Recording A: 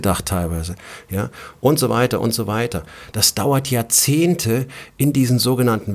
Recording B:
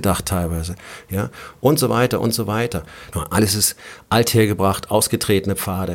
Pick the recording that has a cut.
B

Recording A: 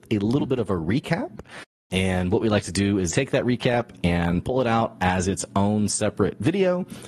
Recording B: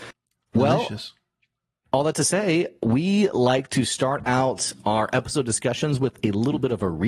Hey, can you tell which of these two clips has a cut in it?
A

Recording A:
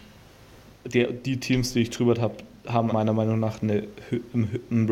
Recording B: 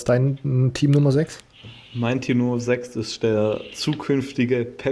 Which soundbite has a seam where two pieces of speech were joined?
A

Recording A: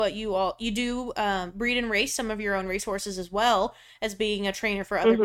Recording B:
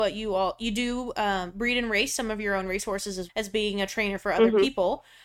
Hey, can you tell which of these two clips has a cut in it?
B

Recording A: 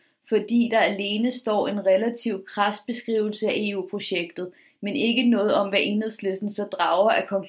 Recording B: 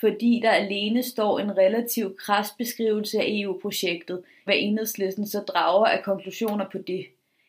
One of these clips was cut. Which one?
B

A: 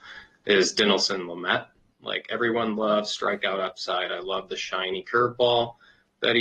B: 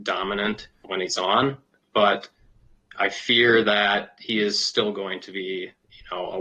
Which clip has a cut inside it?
A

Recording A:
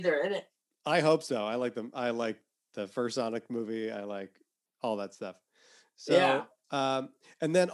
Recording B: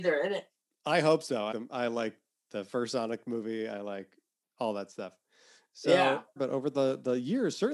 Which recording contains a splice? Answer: B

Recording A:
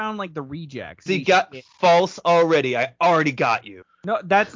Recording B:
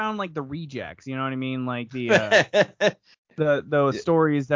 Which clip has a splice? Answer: A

